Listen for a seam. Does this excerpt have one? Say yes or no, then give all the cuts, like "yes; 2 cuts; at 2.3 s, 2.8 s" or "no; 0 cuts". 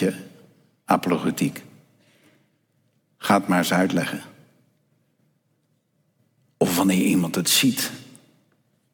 no; 0 cuts